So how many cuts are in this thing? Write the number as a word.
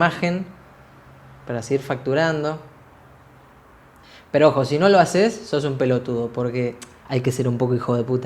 zero